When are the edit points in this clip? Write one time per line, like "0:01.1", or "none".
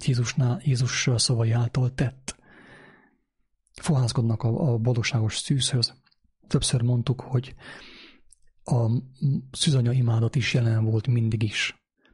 0:06.5